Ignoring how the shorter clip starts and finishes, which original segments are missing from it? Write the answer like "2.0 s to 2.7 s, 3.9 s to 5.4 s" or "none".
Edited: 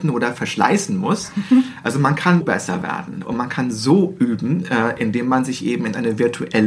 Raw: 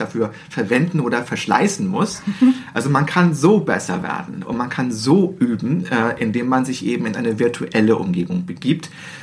3.3 s to 3.6 s